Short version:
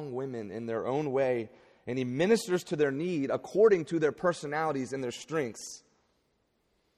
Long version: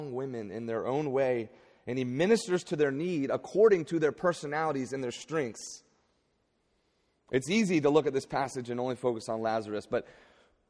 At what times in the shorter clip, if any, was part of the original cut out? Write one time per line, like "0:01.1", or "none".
none